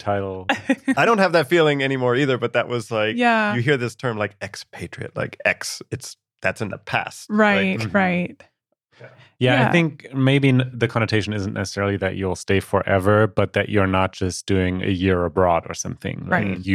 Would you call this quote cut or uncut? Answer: uncut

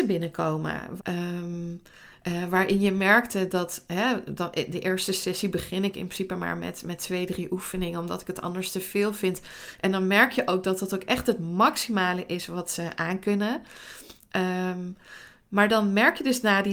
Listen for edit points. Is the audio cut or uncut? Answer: cut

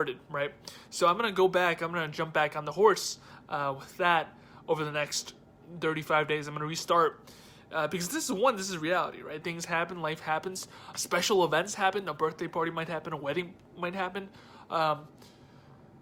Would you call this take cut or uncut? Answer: cut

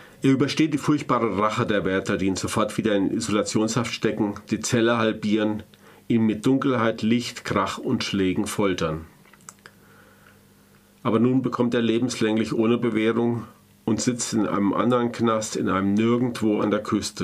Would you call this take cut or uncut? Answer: uncut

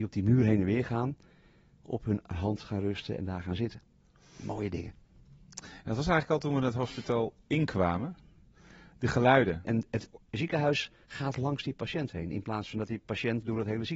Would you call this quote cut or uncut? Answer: cut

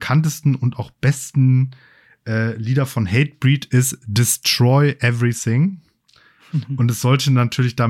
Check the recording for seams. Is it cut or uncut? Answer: uncut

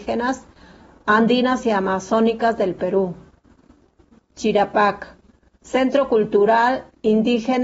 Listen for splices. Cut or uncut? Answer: uncut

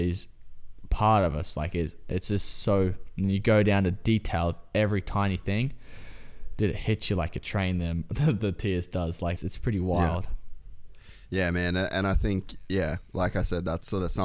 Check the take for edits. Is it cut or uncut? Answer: cut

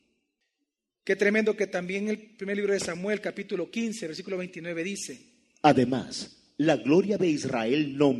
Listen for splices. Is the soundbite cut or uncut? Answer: uncut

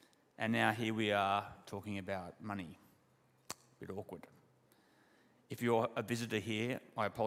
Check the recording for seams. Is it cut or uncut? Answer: uncut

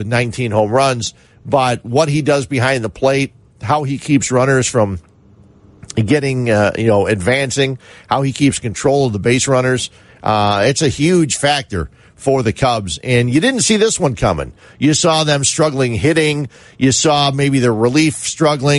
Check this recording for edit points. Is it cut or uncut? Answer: uncut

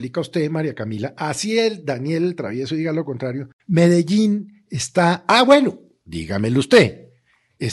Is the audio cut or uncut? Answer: uncut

